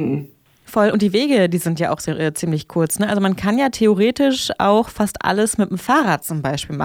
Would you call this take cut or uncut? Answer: uncut